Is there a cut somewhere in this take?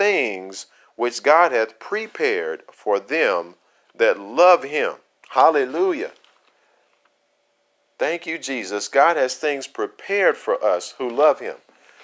no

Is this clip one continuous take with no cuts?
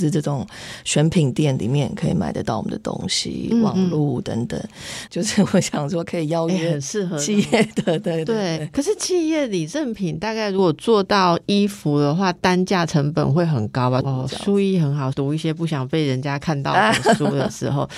no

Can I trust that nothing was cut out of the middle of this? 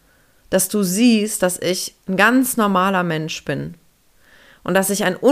yes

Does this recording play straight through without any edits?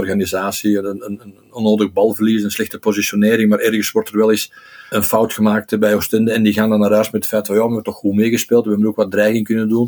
no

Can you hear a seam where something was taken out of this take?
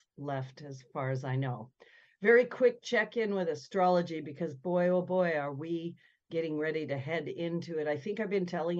no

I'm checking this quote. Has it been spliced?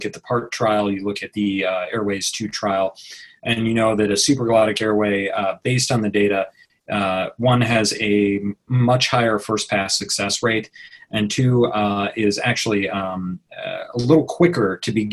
no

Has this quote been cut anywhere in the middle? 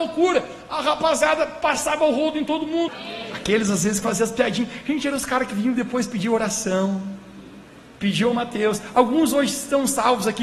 yes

